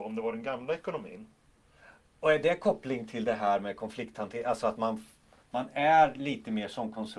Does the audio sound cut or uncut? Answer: uncut